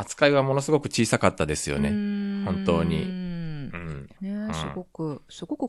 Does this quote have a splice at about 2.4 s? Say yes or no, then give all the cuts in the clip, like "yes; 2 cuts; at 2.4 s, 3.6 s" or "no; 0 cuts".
no; 1 cut; at 4.2 s